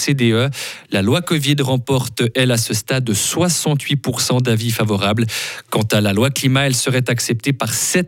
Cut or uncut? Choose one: uncut